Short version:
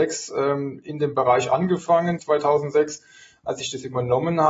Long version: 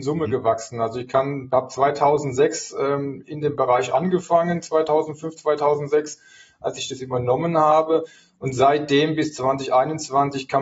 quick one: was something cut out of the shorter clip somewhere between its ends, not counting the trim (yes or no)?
yes